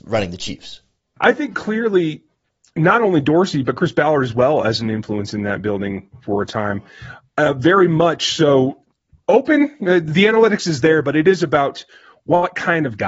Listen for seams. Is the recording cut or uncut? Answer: uncut